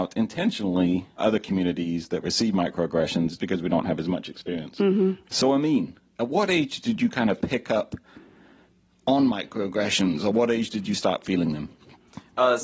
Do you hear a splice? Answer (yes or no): yes